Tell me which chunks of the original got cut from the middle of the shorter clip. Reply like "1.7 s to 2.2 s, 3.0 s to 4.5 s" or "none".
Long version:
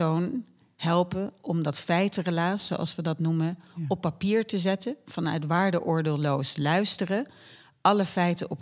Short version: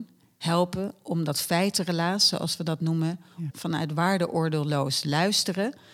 3.9 s to 5.0 s